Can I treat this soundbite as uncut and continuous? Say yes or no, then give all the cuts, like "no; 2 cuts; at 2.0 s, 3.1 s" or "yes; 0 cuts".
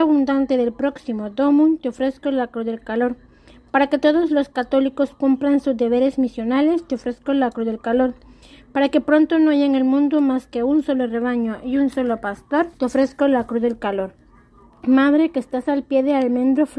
no; 1 cut; at 12.7 s